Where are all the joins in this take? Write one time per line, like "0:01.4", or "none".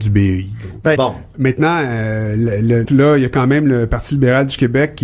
0:01.0
0:02.9